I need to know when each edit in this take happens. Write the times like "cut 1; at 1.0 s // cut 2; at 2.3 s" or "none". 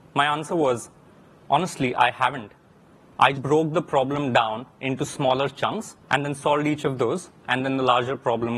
cut 1; at 3.3 s // cut 2; at 6.0 s